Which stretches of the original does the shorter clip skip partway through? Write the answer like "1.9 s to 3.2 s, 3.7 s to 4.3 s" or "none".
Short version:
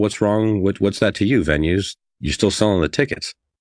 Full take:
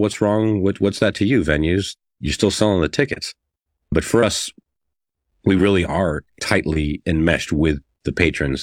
none